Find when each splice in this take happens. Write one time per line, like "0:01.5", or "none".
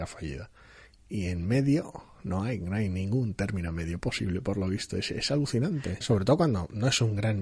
0:06.0